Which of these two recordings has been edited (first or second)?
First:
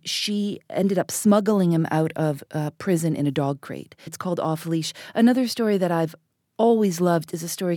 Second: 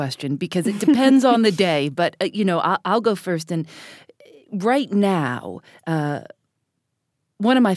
first